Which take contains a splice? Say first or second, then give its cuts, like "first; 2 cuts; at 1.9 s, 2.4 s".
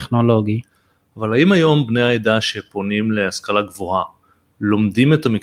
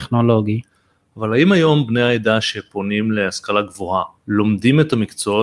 second; 1 cut; at 4.2 s